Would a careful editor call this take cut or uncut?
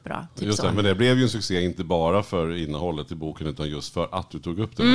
uncut